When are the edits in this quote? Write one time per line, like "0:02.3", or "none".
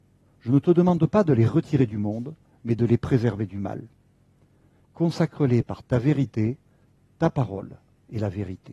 0:04.8